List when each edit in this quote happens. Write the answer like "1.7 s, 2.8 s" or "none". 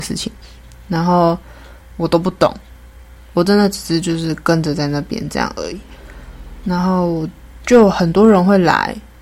none